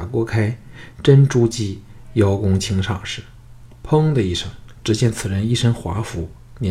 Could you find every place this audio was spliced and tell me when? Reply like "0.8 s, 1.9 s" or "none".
4.7 s